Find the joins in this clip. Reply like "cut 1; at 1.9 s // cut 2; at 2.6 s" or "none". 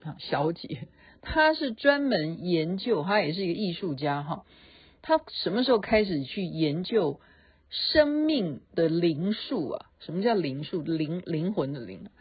cut 1; at 8.7 s